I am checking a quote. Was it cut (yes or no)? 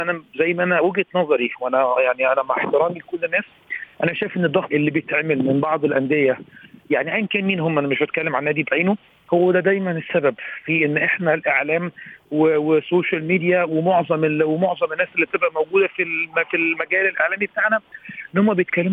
yes